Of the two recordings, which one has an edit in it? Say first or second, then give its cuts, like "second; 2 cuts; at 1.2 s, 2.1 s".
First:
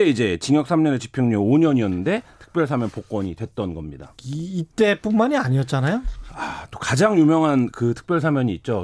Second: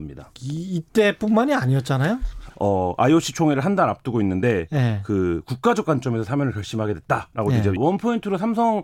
second; 2 cuts; at 2.5 s, 7.8 s